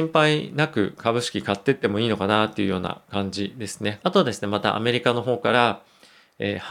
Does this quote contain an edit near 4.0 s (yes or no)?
yes